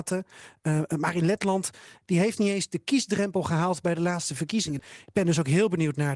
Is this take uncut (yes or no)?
no